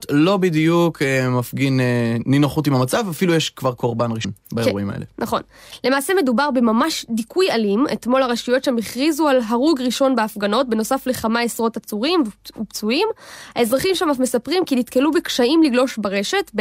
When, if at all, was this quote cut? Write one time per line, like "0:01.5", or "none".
none